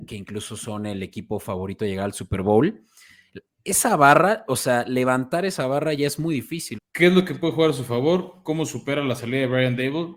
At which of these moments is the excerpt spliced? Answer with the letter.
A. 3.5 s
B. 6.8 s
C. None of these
B